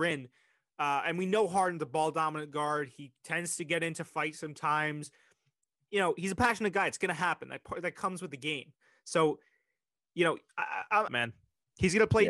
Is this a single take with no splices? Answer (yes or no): no